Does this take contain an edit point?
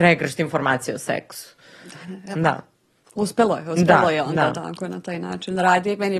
no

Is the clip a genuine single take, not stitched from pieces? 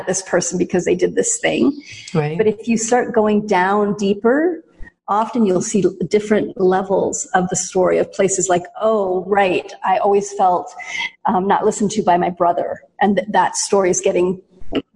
yes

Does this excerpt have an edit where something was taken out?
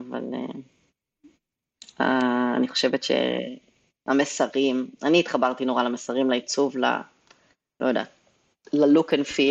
no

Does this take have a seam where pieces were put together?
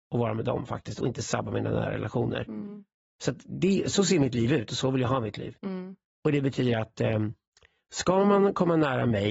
no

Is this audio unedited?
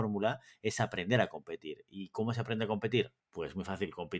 no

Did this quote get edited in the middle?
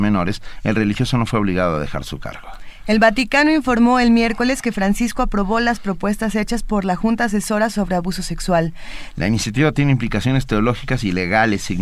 yes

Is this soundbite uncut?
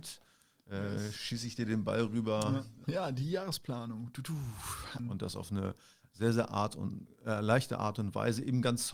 no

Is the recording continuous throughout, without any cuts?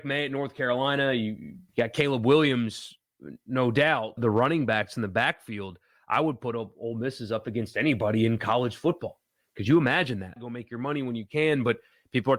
no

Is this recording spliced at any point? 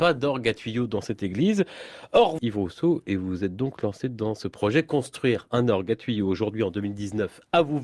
yes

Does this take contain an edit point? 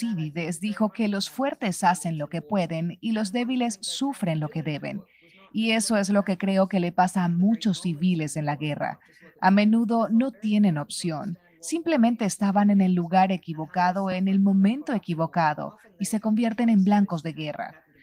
no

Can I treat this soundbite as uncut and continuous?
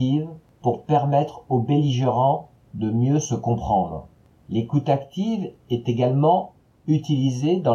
yes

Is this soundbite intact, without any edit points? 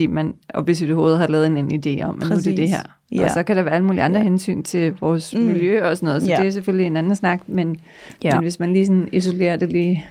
yes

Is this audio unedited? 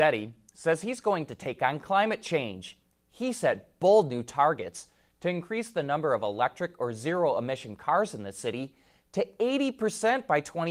yes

